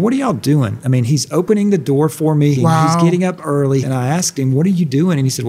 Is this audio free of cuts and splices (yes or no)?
no